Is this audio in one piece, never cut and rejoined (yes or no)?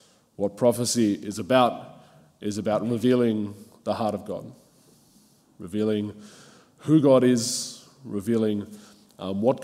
yes